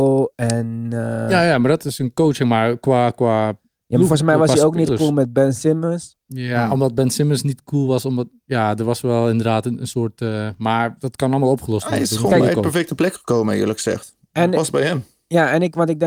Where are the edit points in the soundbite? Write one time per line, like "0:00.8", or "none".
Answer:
0:06.2

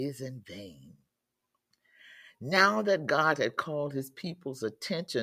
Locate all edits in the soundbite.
none

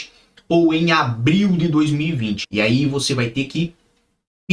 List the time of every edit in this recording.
0:02.4

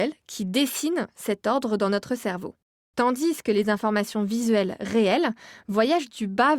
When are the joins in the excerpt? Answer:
none

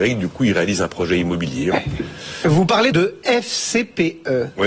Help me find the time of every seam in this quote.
0:01.7
0:02.9

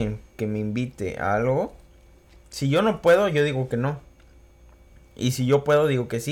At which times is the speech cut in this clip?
none

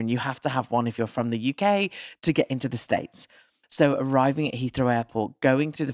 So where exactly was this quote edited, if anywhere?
0:03.6

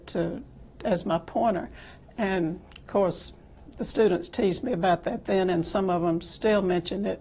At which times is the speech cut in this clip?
none

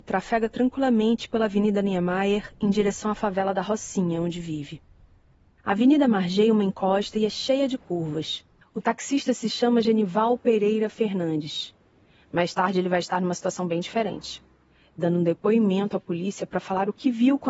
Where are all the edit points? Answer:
0:08.6

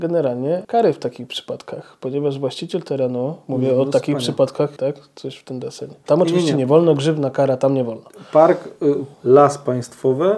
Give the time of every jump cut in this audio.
0:04.8
0:06.1
0:09.1

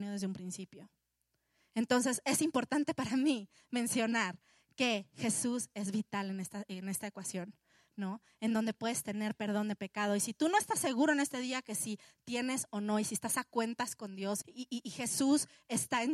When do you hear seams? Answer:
0:14.4

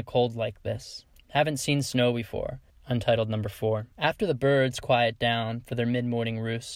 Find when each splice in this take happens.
0:02.7
0:03.9

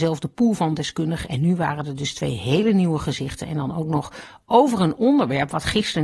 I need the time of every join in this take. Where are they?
0:01.2

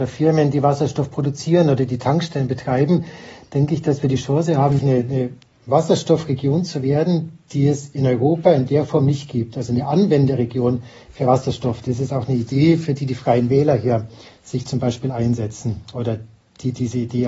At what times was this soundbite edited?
0:04.8

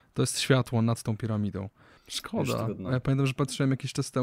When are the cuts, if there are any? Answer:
0:02.0

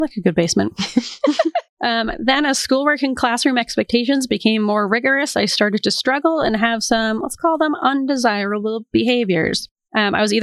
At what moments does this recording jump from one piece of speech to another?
none

